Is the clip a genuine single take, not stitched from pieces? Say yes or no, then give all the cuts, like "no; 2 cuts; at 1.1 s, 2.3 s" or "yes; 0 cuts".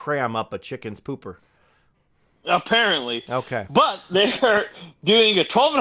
yes; 0 cuts